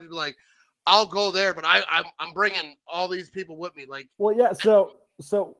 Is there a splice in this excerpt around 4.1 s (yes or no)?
no